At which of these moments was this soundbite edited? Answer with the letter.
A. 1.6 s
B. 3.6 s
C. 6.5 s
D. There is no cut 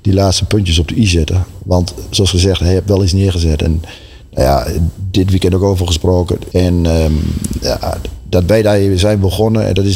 C